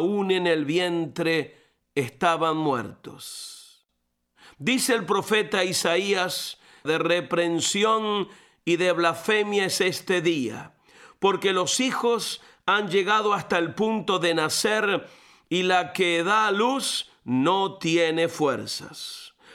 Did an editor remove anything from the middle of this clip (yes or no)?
yes